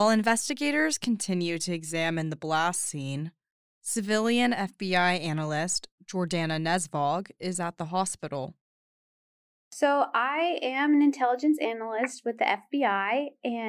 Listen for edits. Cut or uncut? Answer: uncut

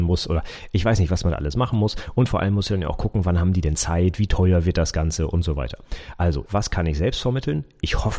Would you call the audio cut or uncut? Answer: cut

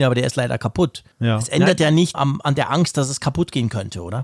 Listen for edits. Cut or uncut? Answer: cut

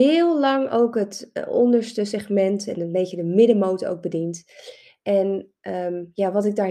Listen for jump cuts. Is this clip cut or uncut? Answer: uncut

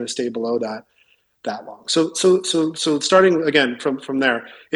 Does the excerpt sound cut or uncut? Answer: uncut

